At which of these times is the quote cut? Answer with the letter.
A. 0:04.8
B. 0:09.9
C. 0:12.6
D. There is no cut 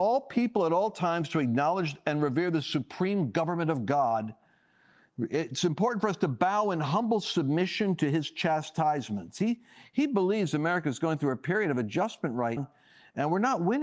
C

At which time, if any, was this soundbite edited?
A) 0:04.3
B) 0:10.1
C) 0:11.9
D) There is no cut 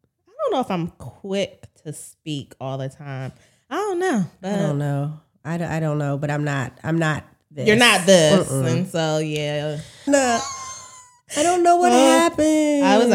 B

